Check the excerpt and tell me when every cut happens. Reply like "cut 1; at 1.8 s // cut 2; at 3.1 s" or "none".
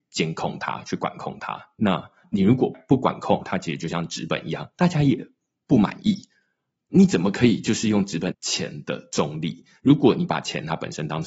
cut 1; at 3.4 s // cut 2; at 8.3 s